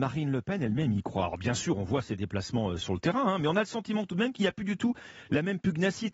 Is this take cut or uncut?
uncut